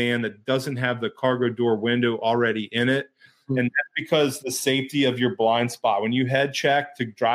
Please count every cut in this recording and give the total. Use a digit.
0